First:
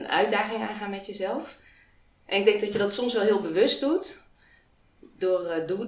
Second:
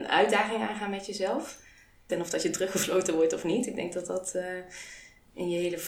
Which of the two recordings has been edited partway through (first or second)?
second